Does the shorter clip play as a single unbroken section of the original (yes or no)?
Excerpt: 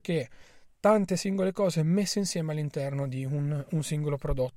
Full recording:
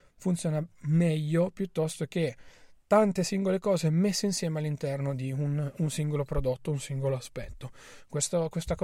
yes